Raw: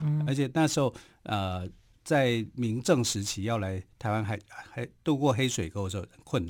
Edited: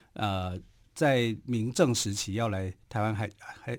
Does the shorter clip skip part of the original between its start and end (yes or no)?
no